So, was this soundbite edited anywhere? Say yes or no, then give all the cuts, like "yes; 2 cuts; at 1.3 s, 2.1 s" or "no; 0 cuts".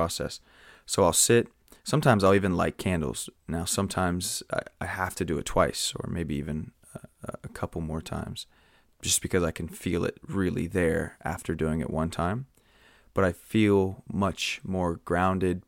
yes; 1 cut; at 3.4 s